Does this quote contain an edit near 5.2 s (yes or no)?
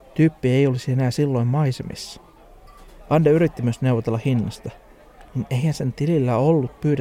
yes